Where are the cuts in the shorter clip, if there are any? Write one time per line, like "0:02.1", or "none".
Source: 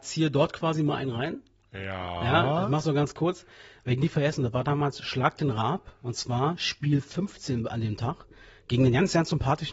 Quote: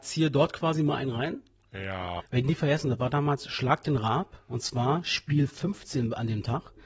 0:02.2